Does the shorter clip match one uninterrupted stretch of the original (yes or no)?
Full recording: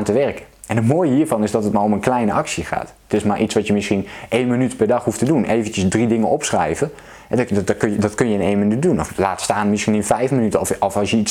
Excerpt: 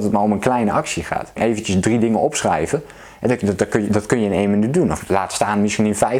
no